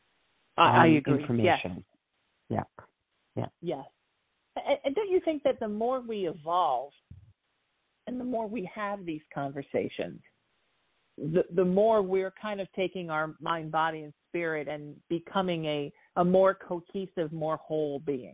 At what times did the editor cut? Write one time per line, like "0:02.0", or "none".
none

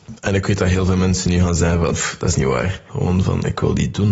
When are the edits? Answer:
0:02.9

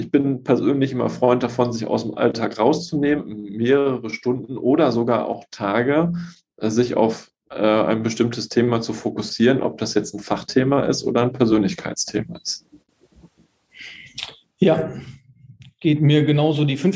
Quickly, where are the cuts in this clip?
0:03.2

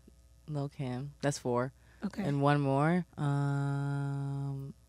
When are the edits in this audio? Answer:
0:01.2
0:03.1

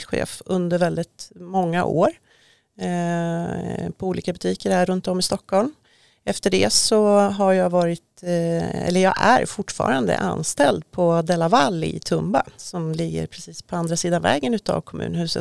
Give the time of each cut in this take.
none

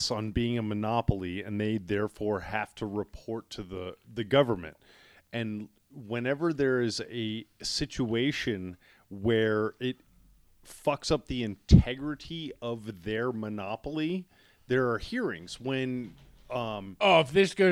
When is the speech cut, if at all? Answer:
none

